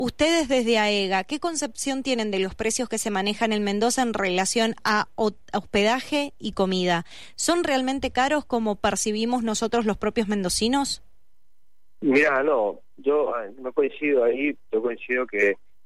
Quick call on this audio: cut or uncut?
uncut